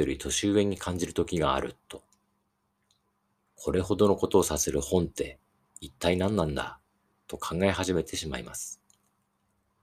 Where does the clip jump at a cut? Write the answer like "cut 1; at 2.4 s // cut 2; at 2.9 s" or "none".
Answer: cut 1; at 3.5 s